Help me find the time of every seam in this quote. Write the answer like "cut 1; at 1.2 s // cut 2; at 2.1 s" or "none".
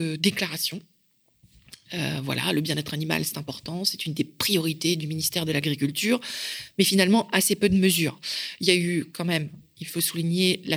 none